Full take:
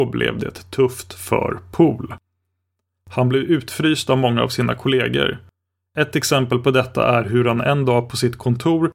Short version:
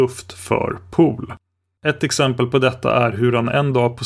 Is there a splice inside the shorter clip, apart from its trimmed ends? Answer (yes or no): yes